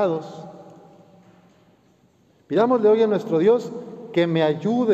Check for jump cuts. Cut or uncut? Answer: uncut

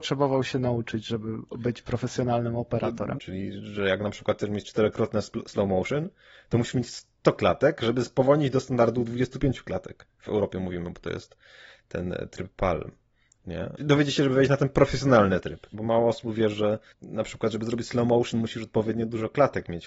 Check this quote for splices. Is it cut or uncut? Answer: cut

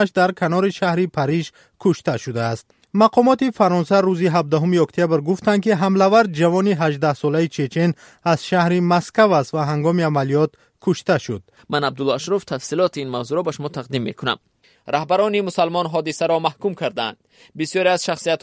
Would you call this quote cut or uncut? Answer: cut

